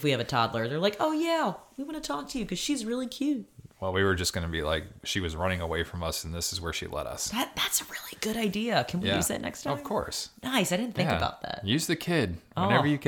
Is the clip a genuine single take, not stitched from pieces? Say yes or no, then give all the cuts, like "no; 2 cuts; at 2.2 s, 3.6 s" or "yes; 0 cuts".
yes; 0 cuts